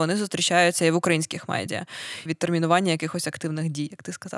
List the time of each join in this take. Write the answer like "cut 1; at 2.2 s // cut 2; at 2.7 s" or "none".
cut 1; at 2.3 s